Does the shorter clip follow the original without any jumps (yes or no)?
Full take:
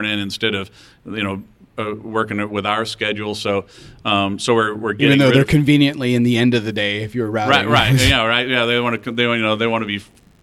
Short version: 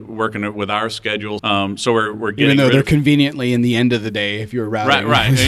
no